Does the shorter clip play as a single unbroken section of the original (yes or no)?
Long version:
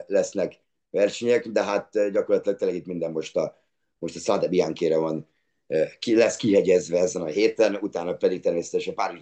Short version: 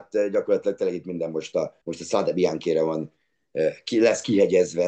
no